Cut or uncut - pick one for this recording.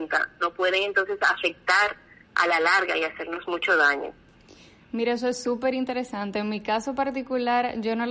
uncut